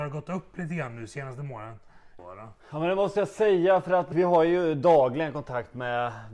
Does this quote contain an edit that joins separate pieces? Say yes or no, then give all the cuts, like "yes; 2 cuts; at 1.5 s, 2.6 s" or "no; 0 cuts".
yes; 2 cuts; at 2.2 s, 4.1 s